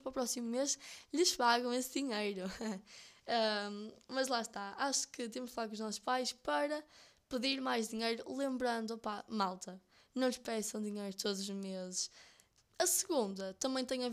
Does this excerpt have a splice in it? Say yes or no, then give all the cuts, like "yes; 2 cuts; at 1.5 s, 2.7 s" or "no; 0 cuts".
yes; 1 cut; at 12.6 s